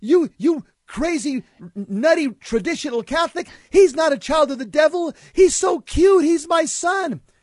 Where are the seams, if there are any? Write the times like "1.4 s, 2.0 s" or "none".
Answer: none